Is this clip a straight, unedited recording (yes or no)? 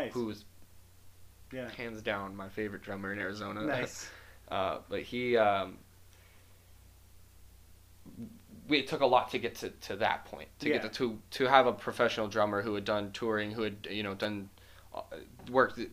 yes